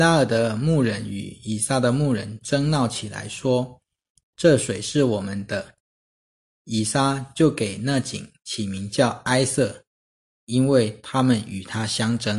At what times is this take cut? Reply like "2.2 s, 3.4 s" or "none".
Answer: none

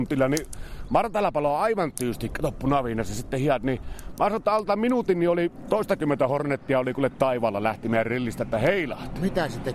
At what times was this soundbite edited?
none

